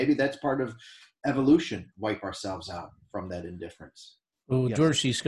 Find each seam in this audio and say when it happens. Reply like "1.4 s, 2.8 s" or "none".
1.9 s